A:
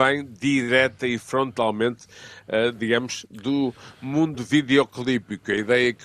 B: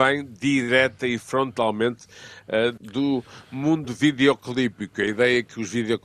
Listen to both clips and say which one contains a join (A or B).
B